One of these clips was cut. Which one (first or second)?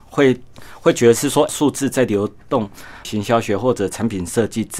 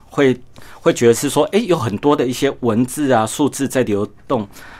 first